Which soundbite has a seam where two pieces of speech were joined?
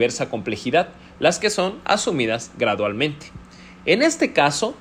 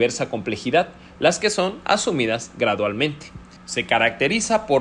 second; 1 cut; at 3.6 s

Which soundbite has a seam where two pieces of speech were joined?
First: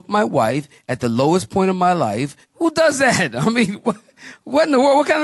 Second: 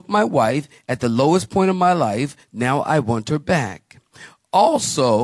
first; 1 cut; at 2.4 s

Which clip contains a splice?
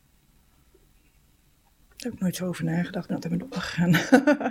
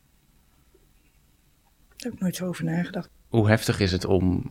second; 1 cut; at 3.1 s

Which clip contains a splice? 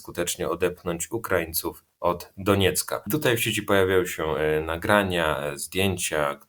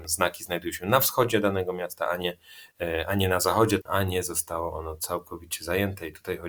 second; 1 cut; at 3.8 s

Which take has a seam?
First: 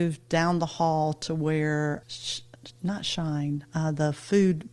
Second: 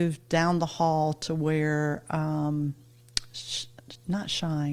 first; 1 cut; at 2.0 s

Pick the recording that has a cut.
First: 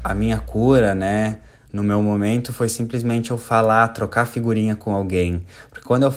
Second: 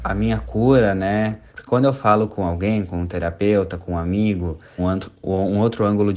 second; 2 cuts; at 1.5 s, 4.8 s

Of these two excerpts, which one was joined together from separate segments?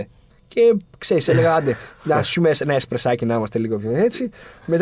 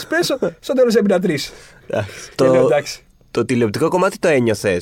second; 1 cut; at 2.3 s

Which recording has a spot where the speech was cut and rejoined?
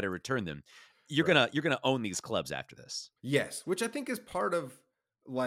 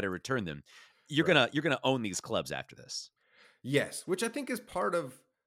first; 1 cut; at 3.2 s

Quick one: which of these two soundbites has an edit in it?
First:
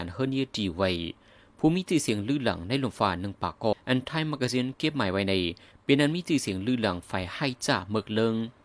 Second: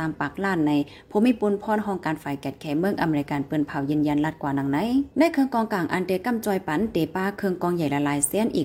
first; 1 cut; at 3.7 s

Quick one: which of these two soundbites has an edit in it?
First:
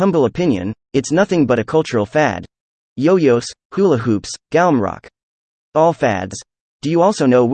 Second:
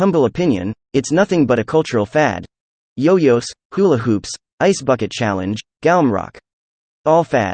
first; 1 cut; at 4.4 s

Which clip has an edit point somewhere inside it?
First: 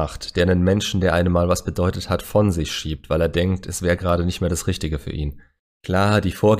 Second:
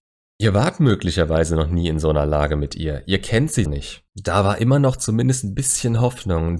second; 1 cut; at 3.7 s

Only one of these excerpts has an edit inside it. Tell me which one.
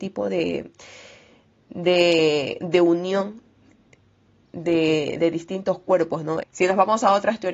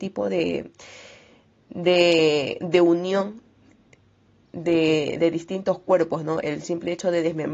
first; 1 cut; at 6.4 s

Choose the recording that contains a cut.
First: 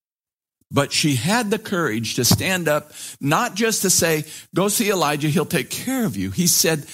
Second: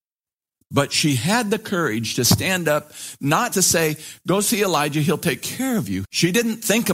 second; 2 cuts; at 3.5 s, 6.0 s

